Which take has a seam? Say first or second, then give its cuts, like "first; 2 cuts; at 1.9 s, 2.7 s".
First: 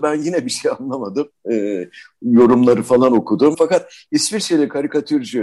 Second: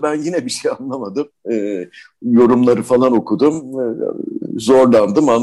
first; 1 cut; at 3.5 s